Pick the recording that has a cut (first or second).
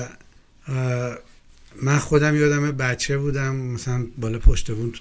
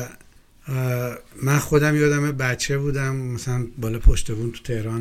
second